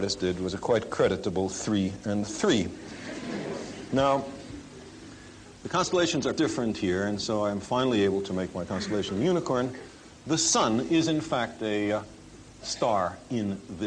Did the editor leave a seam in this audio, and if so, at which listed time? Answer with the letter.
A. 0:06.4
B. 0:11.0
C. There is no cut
A